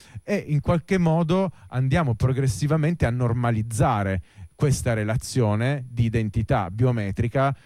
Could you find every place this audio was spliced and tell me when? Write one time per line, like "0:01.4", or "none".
none